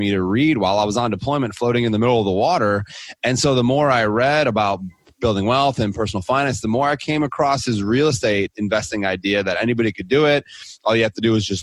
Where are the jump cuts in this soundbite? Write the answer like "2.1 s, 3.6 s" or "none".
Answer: none